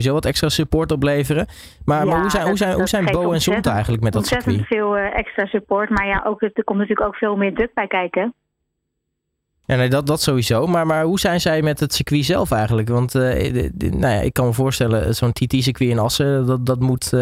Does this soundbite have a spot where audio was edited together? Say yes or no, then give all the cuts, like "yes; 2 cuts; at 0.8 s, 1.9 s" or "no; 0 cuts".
no; 0 cuts